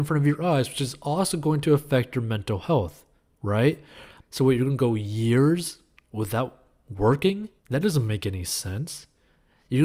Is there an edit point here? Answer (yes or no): yes